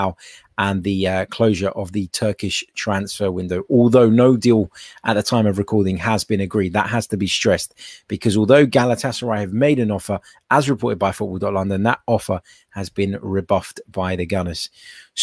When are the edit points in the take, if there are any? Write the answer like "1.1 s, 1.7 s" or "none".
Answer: none